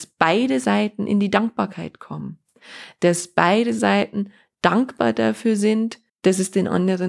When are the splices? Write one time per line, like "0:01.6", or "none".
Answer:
0:06.1